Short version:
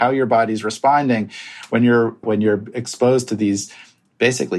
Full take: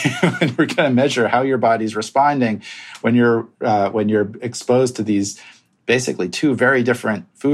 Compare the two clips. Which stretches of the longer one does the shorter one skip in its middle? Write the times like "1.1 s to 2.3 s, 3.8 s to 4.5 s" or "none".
3.5 s to 3.9 s